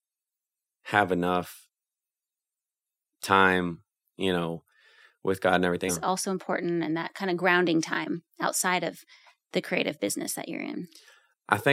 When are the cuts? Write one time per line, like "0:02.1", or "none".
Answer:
0:05.9